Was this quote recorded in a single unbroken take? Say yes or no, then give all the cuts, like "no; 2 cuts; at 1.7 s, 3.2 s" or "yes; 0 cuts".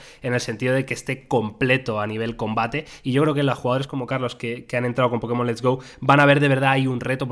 yes; 0 cuts